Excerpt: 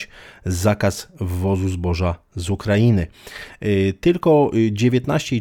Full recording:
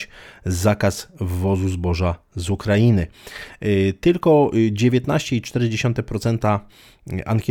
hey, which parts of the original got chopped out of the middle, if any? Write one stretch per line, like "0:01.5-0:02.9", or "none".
none